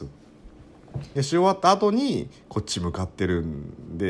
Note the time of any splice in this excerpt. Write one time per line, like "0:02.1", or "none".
0:01.2